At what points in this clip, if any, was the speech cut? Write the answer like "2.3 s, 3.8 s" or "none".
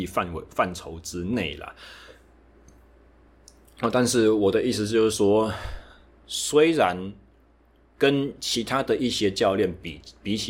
none